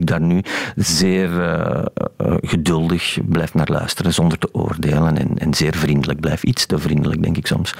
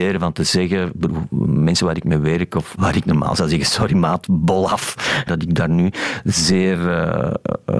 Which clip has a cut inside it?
second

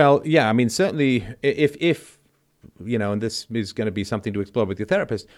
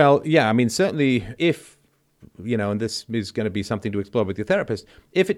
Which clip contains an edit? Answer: second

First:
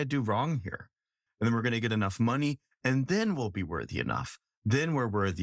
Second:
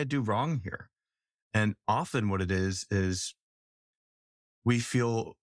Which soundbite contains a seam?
first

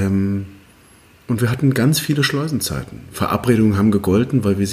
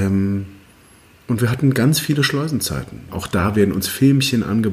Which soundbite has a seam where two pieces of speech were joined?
second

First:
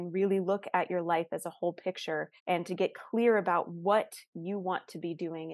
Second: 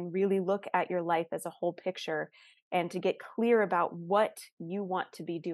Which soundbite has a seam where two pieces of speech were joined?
first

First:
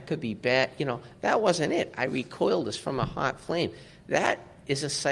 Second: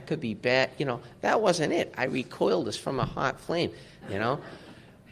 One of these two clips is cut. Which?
second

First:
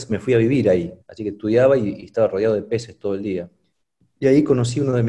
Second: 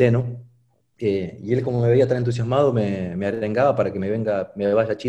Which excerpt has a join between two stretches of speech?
first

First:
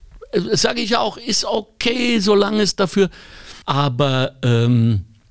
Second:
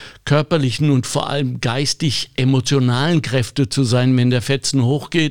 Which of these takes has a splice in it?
first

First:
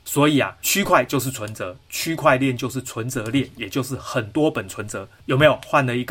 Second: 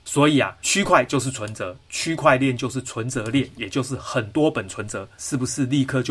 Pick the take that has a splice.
second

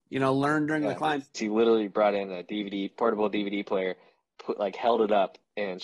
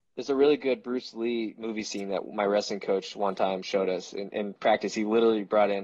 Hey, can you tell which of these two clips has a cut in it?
first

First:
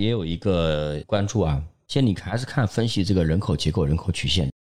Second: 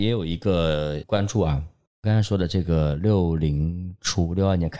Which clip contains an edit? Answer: second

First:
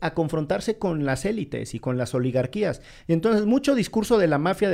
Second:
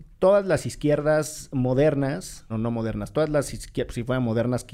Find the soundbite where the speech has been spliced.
second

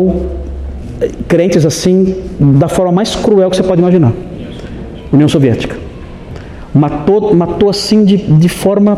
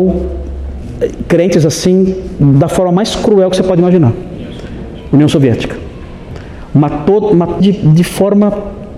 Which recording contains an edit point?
second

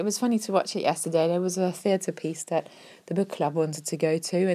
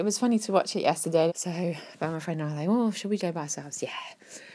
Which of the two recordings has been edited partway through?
second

